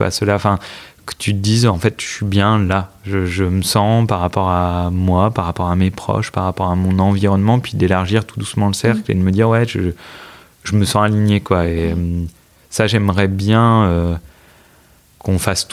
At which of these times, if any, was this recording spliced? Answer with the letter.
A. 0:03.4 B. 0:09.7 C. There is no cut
C